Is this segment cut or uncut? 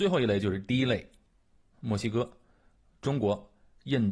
cut